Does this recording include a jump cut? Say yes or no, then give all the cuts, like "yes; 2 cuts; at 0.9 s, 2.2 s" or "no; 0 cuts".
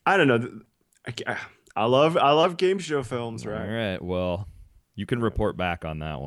no; 0 cuts